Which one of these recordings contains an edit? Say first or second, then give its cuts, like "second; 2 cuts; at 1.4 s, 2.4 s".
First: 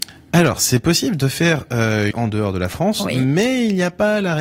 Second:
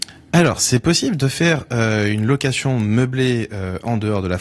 first; 1 cut; at 2.1 s